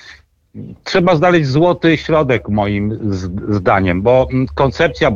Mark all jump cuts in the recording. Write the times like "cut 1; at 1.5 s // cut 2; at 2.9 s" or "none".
none